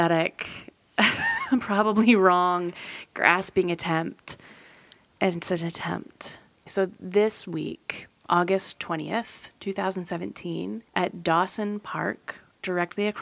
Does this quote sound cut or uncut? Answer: cut